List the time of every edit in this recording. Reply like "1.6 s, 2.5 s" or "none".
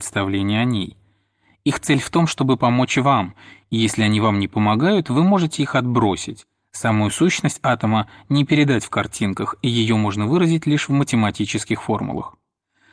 none